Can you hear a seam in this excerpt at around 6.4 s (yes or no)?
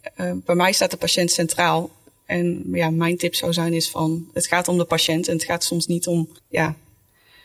yes